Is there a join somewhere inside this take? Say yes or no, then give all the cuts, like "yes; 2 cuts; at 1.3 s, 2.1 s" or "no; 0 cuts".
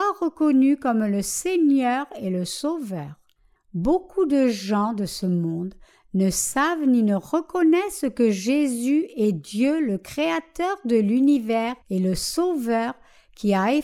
yes; 2 cuts; at 3.6 s, 11.8 s